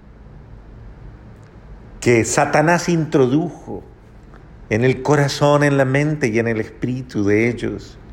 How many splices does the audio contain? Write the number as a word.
zero